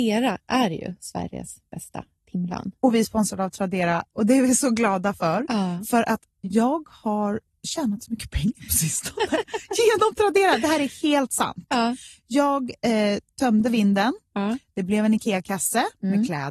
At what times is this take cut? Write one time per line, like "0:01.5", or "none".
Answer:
0:06.3